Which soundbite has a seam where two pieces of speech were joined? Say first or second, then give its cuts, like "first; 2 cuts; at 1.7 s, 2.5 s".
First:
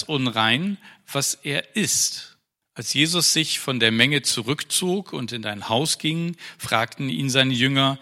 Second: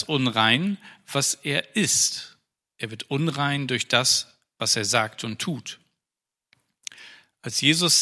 first; 1 cut; at 2.6 s